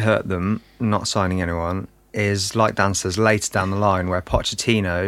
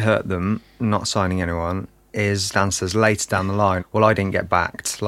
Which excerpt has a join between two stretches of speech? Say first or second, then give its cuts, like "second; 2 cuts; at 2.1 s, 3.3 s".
second; 2 cuts; at 2.5 s, 3.8 s